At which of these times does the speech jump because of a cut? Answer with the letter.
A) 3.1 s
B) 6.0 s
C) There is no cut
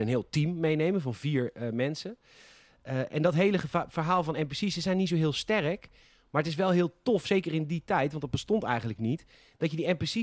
C